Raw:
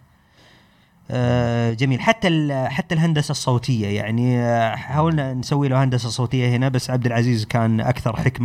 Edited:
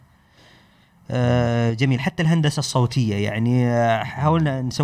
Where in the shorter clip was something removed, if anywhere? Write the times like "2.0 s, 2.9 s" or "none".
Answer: 2.0 s